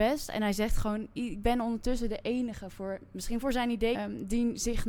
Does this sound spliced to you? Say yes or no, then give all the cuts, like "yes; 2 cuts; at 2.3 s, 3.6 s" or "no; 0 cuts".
yes; 1 cut; at 3.9 s